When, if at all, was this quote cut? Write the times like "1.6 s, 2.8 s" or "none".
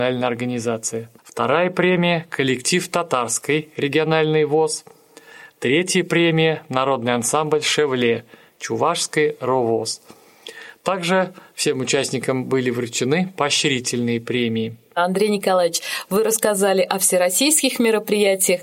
1.2 s